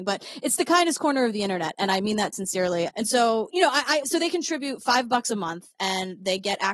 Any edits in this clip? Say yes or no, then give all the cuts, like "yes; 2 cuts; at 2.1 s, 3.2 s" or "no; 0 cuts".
yes; 2 cuts; at 2.9 s, 4.0 s